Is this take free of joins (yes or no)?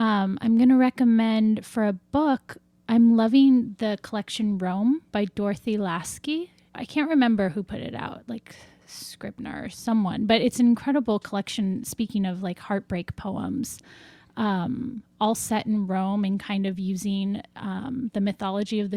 no